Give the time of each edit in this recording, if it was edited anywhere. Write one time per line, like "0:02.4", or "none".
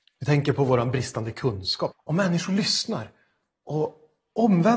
0:01.9